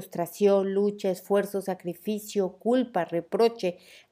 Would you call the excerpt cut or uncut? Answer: uncut